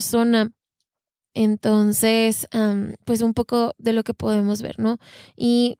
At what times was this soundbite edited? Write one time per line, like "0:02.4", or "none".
0:01.3